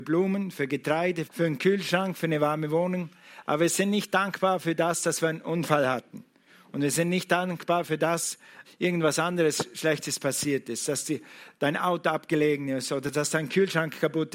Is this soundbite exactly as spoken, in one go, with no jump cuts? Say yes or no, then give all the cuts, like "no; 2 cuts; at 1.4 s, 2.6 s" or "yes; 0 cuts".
no; 2 cuts; at 1.3 s, 8.6 s